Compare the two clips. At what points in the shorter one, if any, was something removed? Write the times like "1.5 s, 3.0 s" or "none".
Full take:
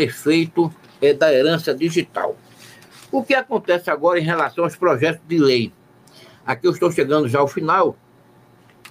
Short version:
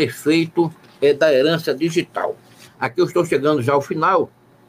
2.6 s